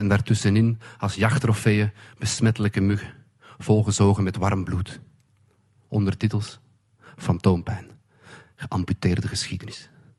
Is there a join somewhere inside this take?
no; 0 cuts

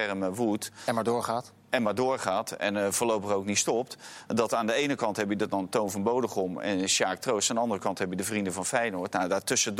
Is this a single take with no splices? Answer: yes; 0 cuts

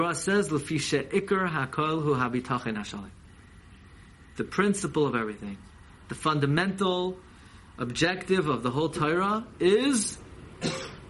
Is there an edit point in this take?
no; 0 cuts

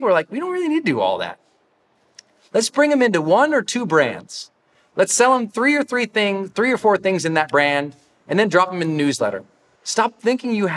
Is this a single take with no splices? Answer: no; 1 cut; at 9.7 s

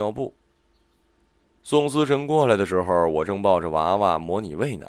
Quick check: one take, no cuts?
yes; 0 cuts

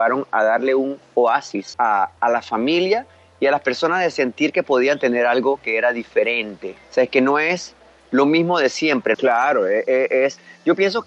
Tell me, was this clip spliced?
yes; 3 cuts; at 2.2 s, 6.8 s, 9.1 s

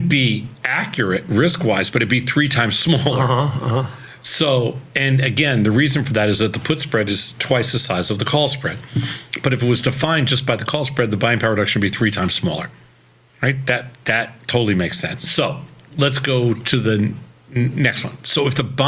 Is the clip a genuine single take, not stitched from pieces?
no; 1 cut; at 15.2 s

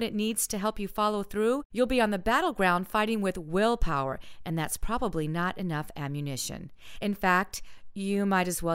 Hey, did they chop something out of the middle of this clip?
no; 0 cuts

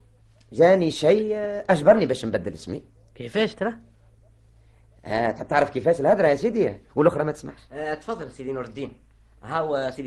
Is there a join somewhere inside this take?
yes; 1 cut; at 6.9 s

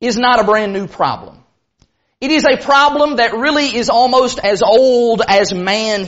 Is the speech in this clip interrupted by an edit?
no; 0 cuts

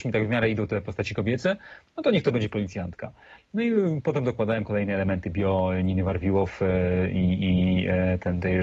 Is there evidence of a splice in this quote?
no; 0 cuts

